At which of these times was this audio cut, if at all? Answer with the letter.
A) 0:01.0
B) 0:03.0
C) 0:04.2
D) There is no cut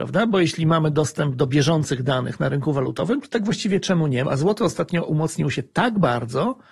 C